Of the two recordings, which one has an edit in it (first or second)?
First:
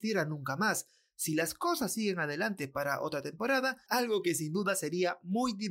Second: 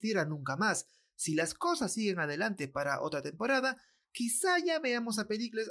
first